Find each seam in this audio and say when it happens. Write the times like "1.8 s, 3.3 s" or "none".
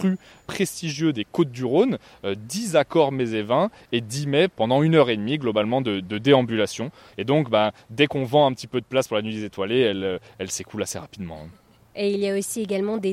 7.1 s